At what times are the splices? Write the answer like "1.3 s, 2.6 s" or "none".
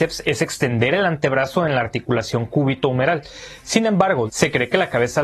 4.3 s